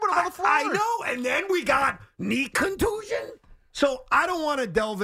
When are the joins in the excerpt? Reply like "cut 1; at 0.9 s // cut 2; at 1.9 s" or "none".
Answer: none